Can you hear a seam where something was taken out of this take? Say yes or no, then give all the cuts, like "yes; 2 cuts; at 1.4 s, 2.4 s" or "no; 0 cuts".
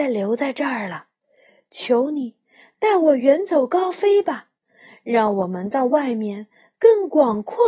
no; 0 cuts